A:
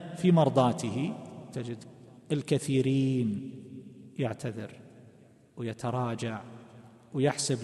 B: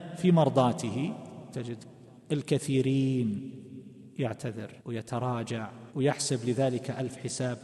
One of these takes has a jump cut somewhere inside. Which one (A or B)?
B